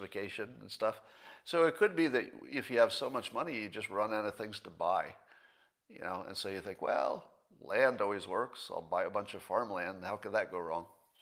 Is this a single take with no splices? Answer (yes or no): yes